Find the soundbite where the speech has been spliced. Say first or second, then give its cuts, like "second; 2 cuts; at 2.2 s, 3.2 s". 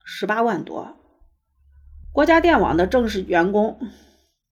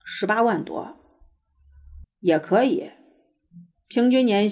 second; 1 cut; at 2.0 s